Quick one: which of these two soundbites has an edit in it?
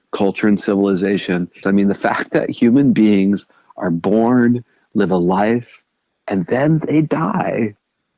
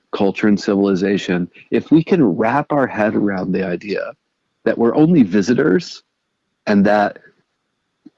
first; 1 cut; at 1.6 s

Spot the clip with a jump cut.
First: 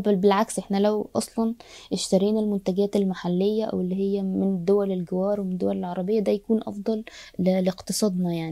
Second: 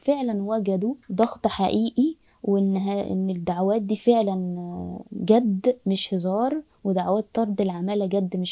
second; 1 cut; at 1.0 s

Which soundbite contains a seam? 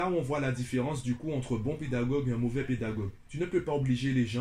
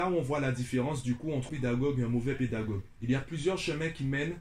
second; 2 cuts; at 1.5 s, 3.0 s

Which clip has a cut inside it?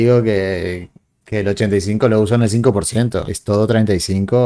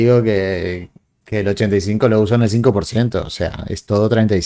first; 1 cut; at 3.3 s

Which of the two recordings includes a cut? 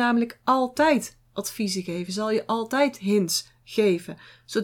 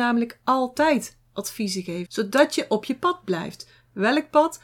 second; 1 cut; at 2.1 s

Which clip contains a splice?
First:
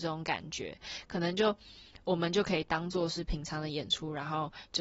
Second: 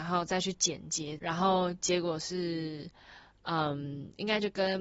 second; 1 cut; at 1.2 s

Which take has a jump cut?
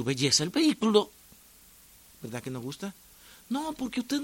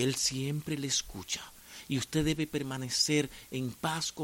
first; 1 cut; at 2.1 s

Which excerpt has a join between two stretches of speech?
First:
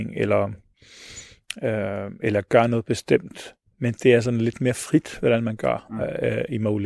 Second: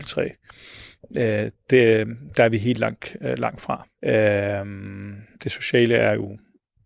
second; 2 cuts; at 4.0 s, 5.4 s

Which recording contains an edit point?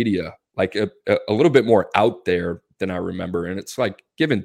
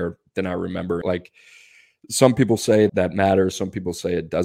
second; 2 cuts; at 1.0 s, 2.9 s

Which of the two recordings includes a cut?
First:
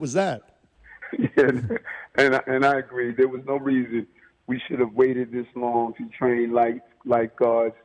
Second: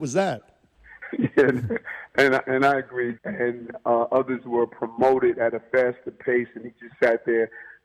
second; 1 cut; at 3.1 s

